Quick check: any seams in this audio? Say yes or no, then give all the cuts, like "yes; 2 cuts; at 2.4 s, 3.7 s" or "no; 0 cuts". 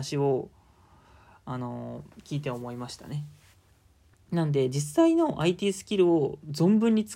yes; 1 cut; at 4.1 s